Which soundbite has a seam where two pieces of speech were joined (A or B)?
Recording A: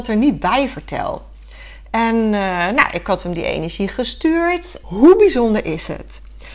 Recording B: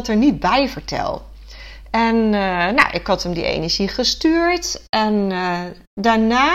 A